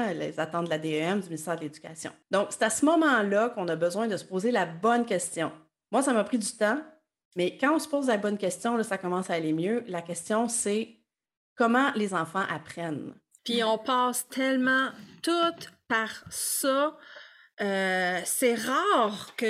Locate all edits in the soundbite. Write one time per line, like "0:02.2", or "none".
0:02.2
0:13.4